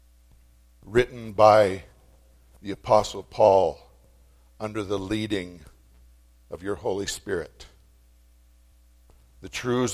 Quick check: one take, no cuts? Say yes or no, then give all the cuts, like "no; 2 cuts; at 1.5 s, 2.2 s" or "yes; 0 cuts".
yes; 0 cuts